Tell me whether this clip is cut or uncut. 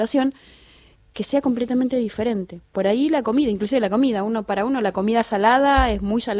uncut